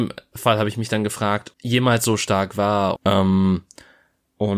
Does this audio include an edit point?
yes; 2 cuts; at 1.5 s, 3.0 s

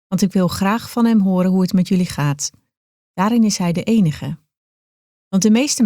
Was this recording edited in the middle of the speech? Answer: yes; 1 cut; at 3.0 s

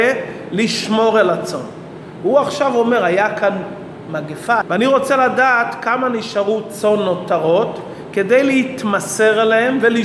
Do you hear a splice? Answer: yes; 1 cut; at 4.6 s

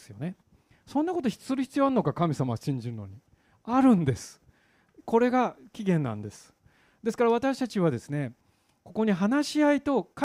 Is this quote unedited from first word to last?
yes; 0 cuts

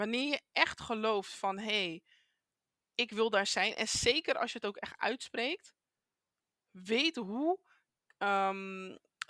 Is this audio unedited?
yes; 0 cuts

